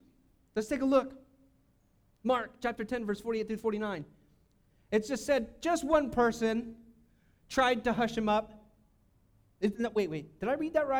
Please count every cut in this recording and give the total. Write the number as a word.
zero